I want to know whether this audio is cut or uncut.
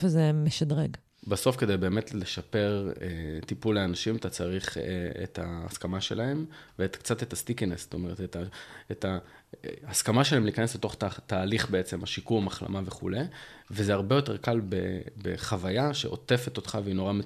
uncut